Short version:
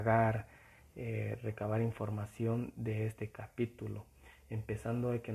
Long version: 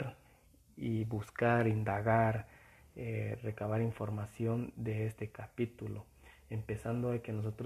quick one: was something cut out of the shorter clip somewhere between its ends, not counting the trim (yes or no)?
no